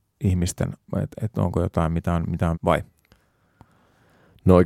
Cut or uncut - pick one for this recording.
cut